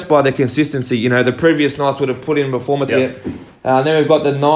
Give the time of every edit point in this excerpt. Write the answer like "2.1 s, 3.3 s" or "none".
2.9 s

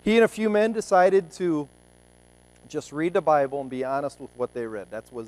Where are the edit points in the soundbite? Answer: none

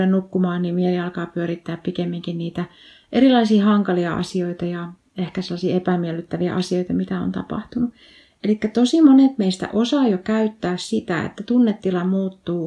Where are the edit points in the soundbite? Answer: 8.3 s

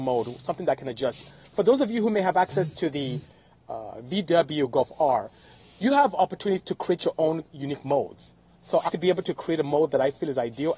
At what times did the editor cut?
3.6 s, 8.9 s

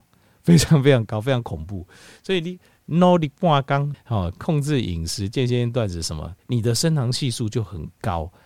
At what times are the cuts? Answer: 3.9 s, 6.4 s

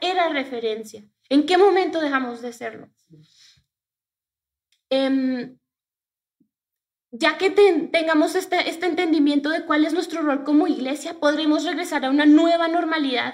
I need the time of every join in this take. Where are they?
none

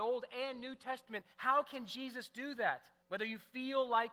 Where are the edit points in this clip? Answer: 3.0 s

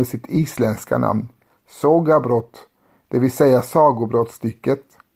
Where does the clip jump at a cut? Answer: none

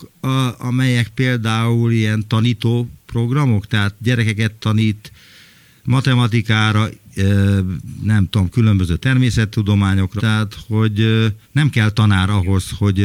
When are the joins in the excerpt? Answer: 10.2 s, 11.4 s

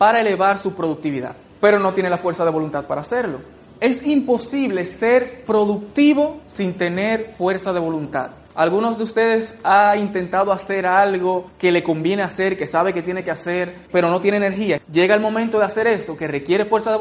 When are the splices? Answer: 8.5 s, 14.8 s

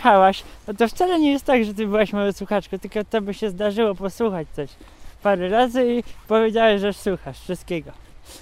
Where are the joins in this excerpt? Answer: none

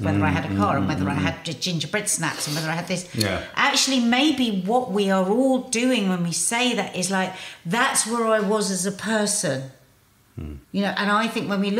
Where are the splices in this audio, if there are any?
10.6 s

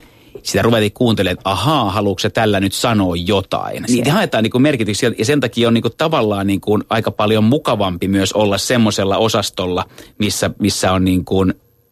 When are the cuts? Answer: 3.9 s

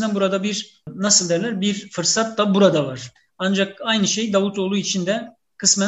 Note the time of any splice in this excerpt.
3.3 s

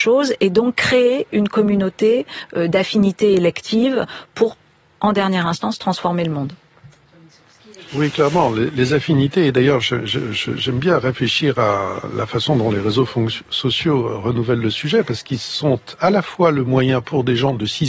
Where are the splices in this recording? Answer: 7.9 s

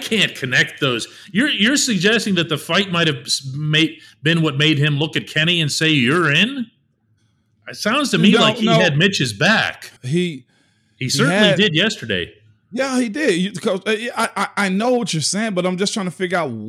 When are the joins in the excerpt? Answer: 10.0 s

